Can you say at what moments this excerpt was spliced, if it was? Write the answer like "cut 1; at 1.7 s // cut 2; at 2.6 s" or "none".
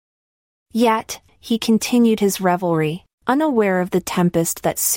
cut 1; at 1.3 s // cut 2; at 3.1 s